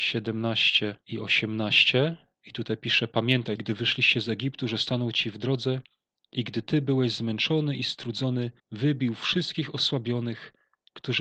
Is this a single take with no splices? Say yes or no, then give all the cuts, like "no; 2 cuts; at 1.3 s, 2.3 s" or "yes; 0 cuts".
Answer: no; 2 cuts; at 3.6 s, 8.6 s